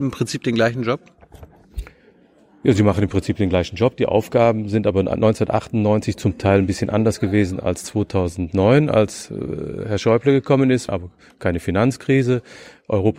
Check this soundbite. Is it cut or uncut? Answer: cut